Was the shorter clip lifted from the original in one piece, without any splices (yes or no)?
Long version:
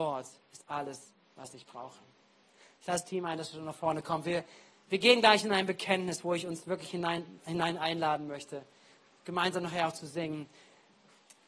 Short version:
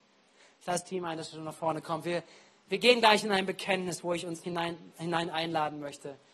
no